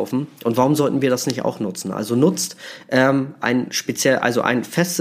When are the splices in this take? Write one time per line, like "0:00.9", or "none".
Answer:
none